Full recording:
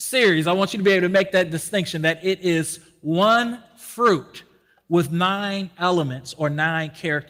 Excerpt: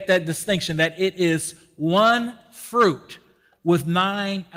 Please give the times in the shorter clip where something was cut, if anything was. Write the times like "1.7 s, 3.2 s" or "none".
none